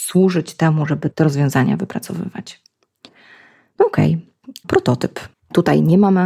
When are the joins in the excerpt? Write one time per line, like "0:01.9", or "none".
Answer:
0:05.3